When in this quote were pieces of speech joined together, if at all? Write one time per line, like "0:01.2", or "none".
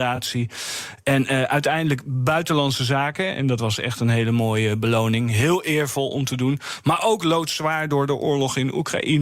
none